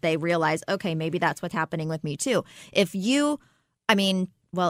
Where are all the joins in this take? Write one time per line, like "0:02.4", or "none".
none